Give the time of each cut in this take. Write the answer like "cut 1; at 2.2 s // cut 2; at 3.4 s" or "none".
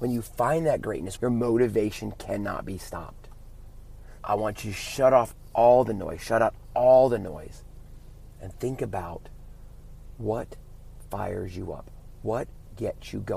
cut 1; at 1.2 s // cut 2; at 4.2 s